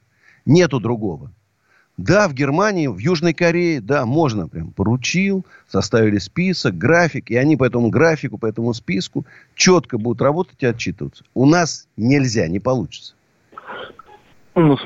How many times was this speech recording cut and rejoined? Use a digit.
0